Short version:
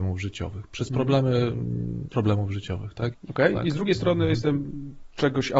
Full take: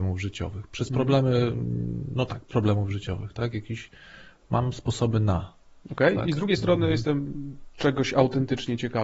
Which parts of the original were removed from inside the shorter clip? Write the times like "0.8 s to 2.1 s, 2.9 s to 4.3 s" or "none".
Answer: 2.1 s to 2.5 s, 3.5 s to 5.7 s